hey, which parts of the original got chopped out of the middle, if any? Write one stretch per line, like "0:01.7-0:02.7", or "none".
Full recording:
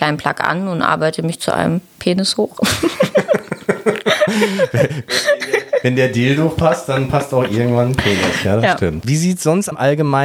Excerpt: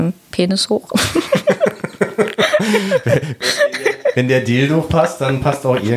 none